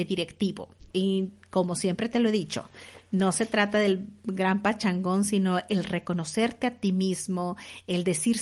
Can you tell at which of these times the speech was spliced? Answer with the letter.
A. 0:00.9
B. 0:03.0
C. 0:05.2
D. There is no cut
A